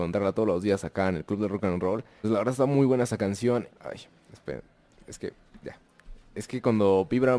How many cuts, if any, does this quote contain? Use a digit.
2